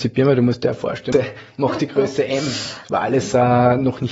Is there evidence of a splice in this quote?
yes; 1 cut; at 1.1 s

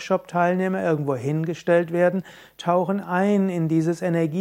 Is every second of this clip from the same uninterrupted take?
yes; 0 cuts

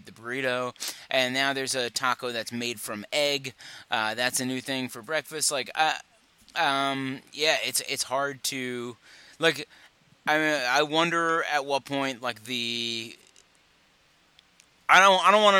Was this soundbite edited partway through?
no; 0 cuts

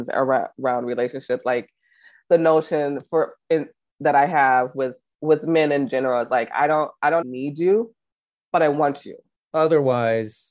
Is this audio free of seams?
no; 2 cuts; at 7.2 s, 9.4 s

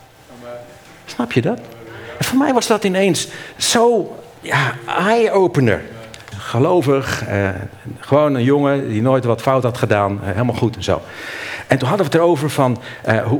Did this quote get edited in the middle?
yes; 1 cut; at 6.3 s

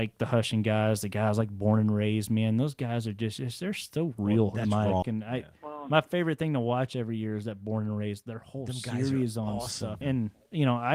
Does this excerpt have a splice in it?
yes; 2 cuts; at 5.0 s, 10.0 s

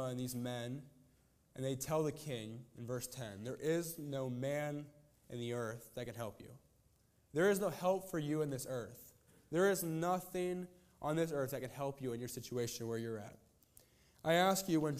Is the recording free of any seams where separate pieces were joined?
yes; 0 cuts

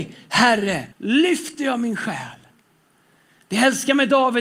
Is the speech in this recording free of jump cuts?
no; 1 cut; at 0.9 s

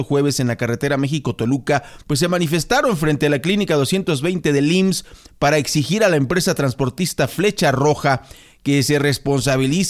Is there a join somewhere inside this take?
yes; 1 cut; at 2.0 s

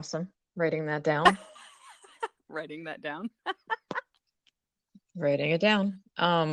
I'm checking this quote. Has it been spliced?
no; 0 cuts

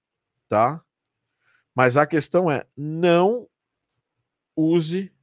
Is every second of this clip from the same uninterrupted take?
yes; 0 cuts

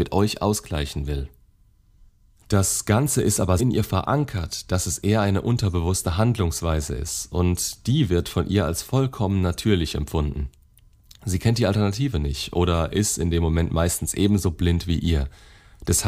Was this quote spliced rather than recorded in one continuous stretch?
yes; 1 cut; at 3.6 s

